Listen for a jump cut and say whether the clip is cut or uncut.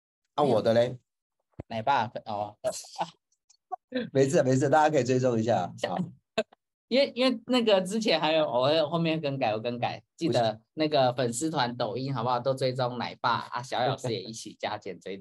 uncut